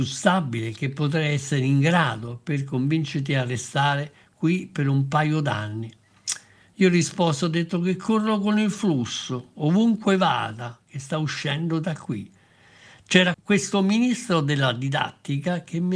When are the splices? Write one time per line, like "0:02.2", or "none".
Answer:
0:13.3